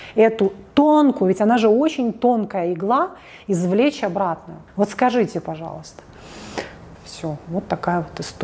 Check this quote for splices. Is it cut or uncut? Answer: cut